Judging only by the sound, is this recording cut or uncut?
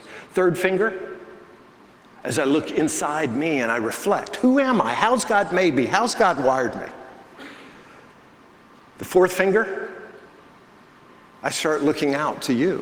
uncut